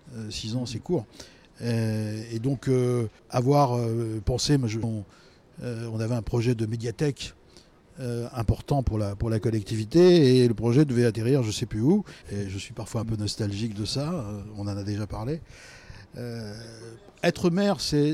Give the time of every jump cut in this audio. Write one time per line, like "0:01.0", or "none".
0:03.2
0:04.8
0:12.2